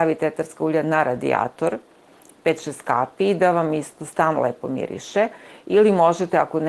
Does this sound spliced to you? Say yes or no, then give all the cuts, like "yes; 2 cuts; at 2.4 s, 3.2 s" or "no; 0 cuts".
no; 0 cuts